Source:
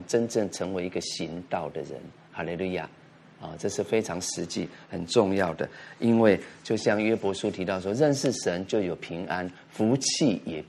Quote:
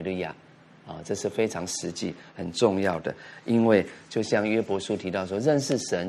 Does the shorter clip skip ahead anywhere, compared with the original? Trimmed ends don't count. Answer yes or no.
no